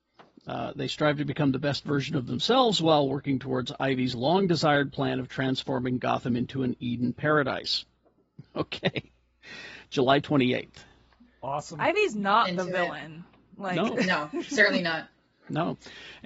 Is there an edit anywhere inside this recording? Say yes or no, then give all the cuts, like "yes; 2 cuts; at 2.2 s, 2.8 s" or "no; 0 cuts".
no; 0 cuts